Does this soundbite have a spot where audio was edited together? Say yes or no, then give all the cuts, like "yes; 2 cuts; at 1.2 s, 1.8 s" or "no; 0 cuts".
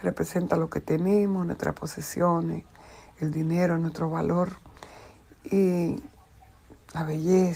no; 0 cuts